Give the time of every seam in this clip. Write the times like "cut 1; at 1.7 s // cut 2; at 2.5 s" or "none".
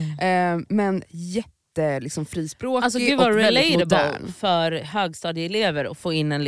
none